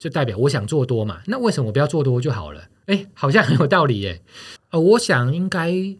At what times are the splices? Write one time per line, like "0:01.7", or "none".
0:04.6